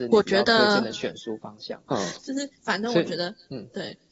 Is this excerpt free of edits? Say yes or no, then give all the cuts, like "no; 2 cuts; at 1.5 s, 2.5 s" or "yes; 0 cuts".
no; 1 cut; at 1.9 s